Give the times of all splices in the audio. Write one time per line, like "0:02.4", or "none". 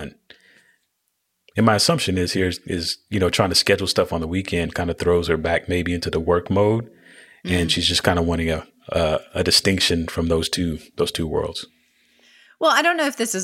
none

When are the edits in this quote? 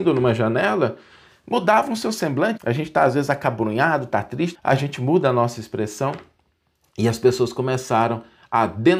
0:02.6
0:04.5

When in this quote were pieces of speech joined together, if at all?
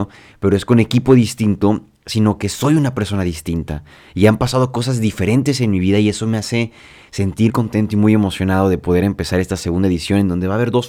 0:07.5

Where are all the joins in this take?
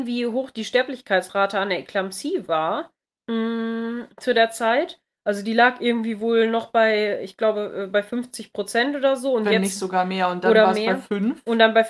none

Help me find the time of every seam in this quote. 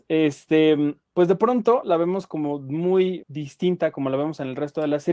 0:01.0
0:03.2

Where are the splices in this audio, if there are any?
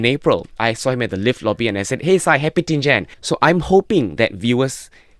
0:03.1

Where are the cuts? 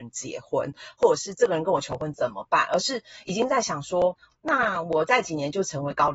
none

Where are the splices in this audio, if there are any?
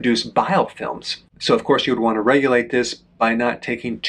0:01.3

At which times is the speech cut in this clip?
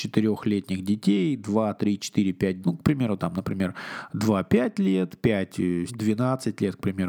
0:02.6
0:05.9

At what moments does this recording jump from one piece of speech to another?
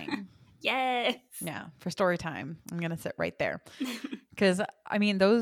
none

